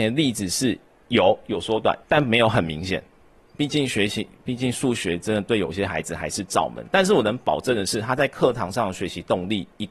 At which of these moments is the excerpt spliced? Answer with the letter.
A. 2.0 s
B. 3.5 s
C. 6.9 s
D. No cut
A